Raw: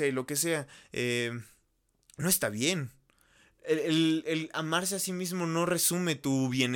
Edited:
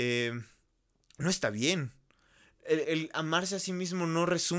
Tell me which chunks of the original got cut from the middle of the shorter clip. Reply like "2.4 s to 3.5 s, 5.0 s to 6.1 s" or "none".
3.8 s to 4.2 s